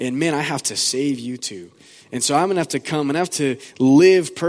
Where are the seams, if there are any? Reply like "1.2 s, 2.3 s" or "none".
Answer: none